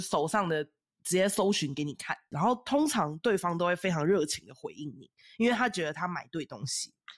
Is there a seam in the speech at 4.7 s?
no; 1 cut; at 2.3 s

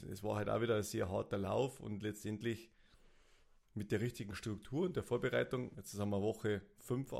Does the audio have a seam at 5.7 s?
yes; 1 cut; at 5.7 s

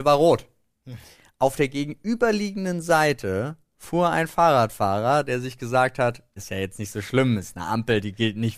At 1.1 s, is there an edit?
no; 1 cut; at 6.4 s

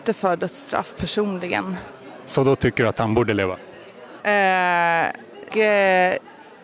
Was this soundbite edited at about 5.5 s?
yes; 2 cuts; at 4.2 s, 5.5 s

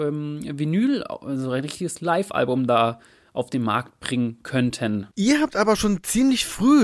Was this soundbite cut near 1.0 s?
no; 1 cut; at 5.1 s

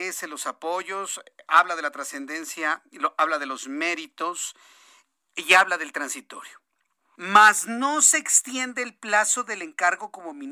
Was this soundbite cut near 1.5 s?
no; 1 cut; at 7.2 s

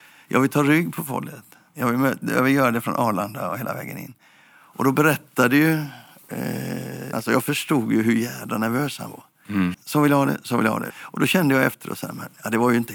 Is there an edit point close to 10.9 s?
yes; 3 cuts; at 7.1 s, 9.7 s, 10.9 s

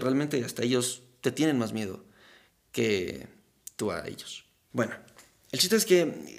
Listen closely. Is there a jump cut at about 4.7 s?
yes; 1 cut; at 4.7 s

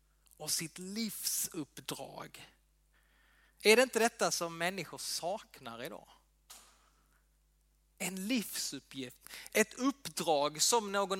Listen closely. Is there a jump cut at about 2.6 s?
no; 1 cut; at 9.5 s

